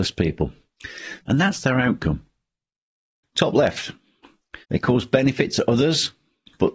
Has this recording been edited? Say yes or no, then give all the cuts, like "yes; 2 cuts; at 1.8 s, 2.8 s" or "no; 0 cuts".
yes; 3 cuts; at 1.2 s, 3.2 s, 4.6 s